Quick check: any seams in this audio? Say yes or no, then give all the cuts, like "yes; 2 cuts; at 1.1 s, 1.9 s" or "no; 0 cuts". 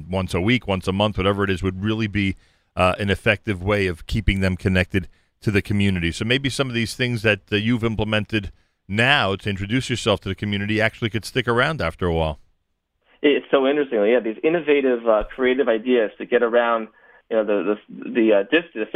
no; 0 cuts